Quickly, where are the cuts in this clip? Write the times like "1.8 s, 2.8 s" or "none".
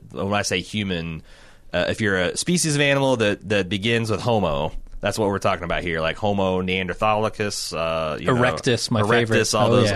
none